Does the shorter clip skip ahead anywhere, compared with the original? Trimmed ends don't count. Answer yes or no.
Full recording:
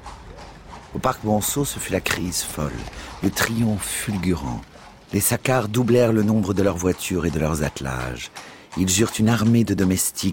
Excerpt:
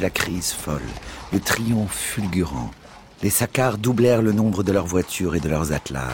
no